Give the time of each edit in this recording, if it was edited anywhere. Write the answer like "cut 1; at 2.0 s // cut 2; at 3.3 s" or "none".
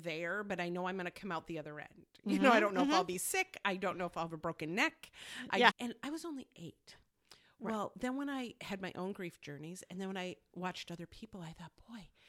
cut 1; at 5.7 s